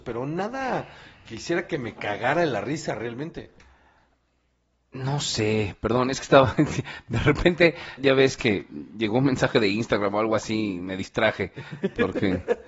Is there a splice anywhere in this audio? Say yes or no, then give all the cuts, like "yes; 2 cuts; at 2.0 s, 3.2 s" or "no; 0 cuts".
yes; 1 cut; at 8.0 s